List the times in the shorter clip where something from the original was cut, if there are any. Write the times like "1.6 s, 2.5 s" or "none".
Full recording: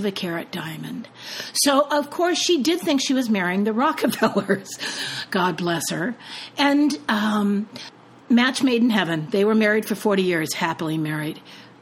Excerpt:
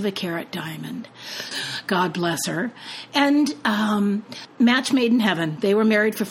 1.5 s, 4.5 s